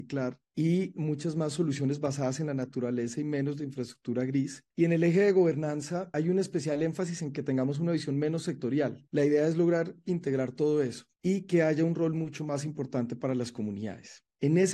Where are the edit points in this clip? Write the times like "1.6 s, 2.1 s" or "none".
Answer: 9.1 s